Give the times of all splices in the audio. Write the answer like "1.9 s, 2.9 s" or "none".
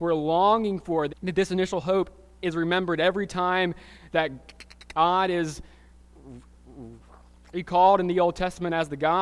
1.1 s